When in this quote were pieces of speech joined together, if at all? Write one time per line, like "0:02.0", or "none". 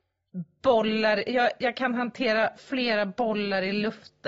none